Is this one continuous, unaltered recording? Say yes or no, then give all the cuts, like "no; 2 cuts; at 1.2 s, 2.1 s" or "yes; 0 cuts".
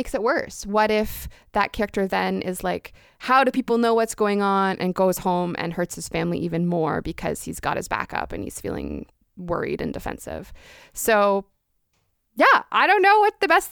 yes; 0 cuts